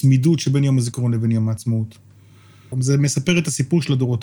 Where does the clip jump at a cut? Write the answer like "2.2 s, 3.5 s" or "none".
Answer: 2.7 s